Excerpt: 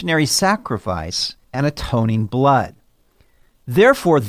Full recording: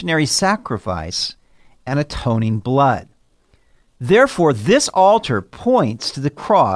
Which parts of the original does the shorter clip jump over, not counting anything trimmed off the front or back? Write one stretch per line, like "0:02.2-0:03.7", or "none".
0:01.4-0:01.8